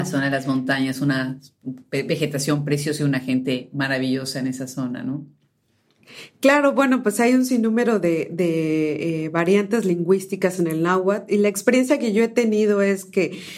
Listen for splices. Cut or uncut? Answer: uncut